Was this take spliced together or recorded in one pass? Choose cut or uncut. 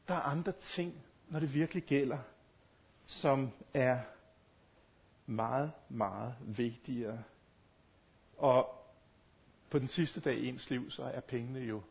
uncut